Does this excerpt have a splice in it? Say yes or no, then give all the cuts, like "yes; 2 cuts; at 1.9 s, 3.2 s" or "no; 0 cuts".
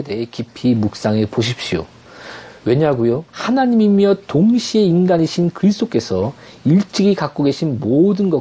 yes; 1 cut; at 3.3 s